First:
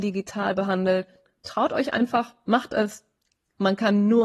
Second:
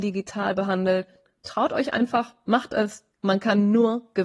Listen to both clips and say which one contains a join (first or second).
second